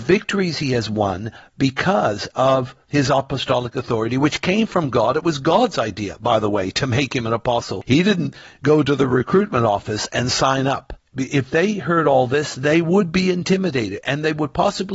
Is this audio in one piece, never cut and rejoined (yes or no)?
yes